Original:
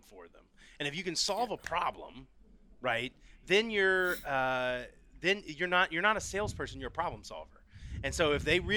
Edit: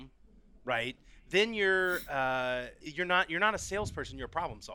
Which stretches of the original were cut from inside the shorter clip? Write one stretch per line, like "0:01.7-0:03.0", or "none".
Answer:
0:05.0-0:05.4